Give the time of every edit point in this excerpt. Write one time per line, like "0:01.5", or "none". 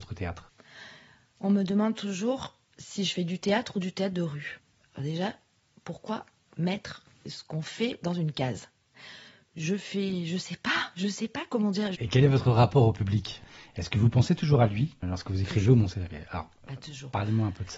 0:11.9
0:15.0